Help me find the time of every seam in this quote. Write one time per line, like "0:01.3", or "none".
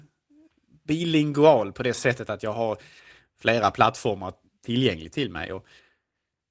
none